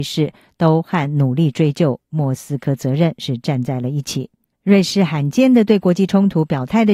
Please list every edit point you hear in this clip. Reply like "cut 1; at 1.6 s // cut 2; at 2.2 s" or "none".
cut 1; at 4.5 s

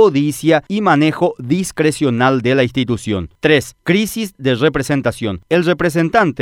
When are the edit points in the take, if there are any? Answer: none

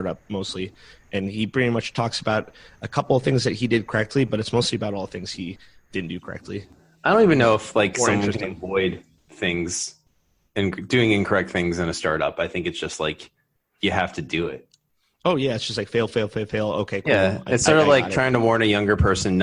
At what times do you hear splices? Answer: none

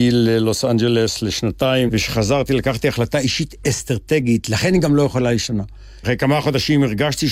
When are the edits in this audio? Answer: cut 1; at 1.9 s // cut 2; at 6.0 s

